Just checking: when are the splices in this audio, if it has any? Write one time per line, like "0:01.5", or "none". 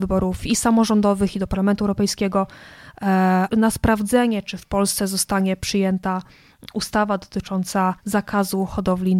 0:03.5
0:08.0